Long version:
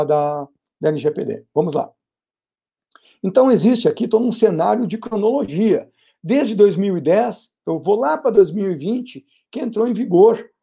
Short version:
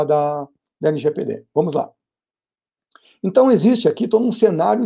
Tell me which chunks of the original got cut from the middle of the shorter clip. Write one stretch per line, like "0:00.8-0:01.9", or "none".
none